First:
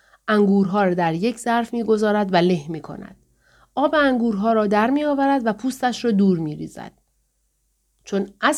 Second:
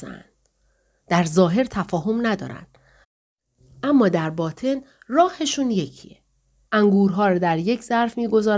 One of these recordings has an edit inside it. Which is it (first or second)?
second